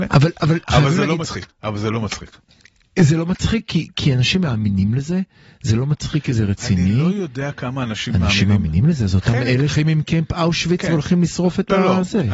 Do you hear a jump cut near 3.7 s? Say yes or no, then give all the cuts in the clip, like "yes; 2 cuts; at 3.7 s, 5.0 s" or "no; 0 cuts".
no; 2 cuts; at 1.5 s, 9.7 s